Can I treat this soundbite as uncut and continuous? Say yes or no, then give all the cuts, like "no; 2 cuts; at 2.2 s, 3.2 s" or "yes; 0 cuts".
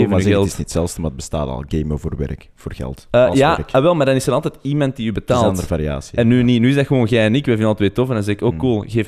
yes; 0 cuts